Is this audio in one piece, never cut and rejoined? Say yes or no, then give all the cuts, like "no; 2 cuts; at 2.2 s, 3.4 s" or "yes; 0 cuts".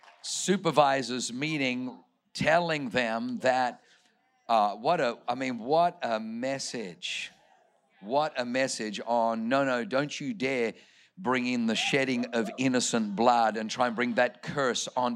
yes; 0 cuts